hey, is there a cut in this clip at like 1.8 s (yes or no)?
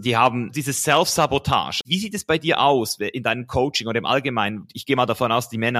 yes